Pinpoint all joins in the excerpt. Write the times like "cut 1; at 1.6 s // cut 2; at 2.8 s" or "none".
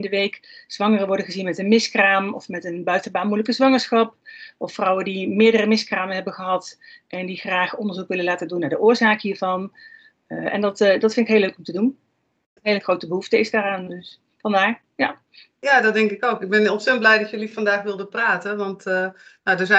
cut 1; at 12.6 s

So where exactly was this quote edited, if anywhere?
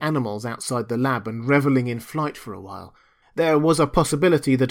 cut 1; at 3.2 s

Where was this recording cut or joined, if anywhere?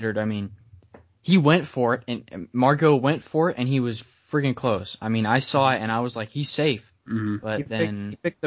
cut 1; at 4.0 s // cut 2; at 6.9 s

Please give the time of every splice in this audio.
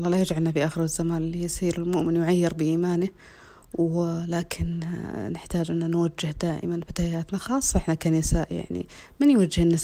none

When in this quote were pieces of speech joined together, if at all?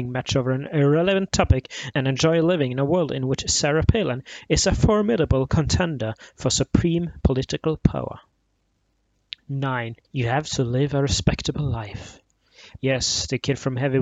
cut 1; at 10.0 s // cut 2; at 12.8 s

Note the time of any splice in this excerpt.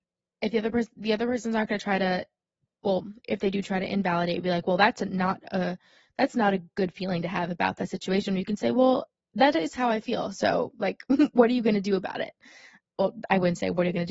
none

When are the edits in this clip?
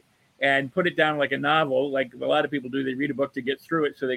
none

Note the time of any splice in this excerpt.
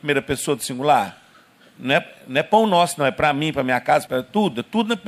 cut 1; at 4.1 s

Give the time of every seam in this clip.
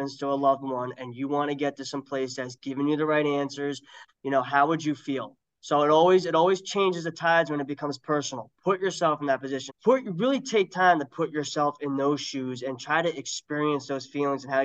cut 1; at 4.1 s // cut 2; at 9.7 s

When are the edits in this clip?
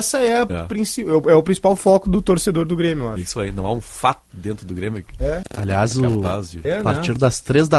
cut 1; at 5.4 s // cut 2; at 6.6 s

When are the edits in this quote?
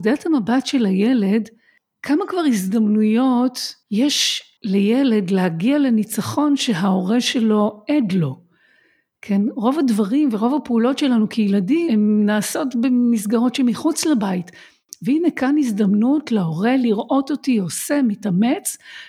cut 1; at 11.9 s

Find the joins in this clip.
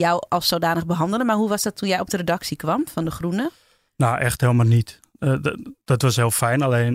none

